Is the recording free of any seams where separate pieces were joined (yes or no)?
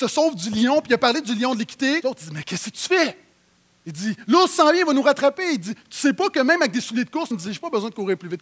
no